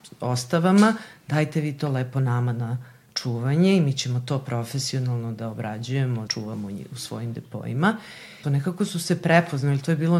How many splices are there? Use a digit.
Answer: 2